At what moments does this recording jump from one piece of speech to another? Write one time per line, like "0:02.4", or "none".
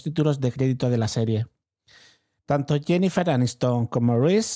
0:02.4